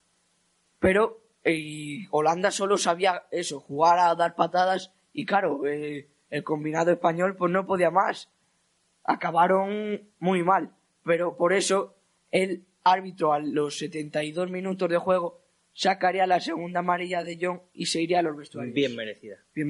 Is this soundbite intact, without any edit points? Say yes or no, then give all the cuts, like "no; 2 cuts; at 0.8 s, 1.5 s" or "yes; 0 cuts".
yes; 0 cuts